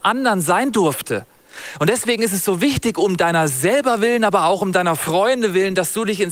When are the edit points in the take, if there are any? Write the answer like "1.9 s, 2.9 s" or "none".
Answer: none